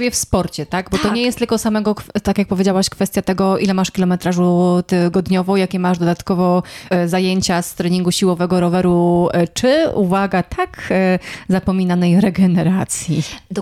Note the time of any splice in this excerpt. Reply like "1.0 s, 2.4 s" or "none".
6.9 s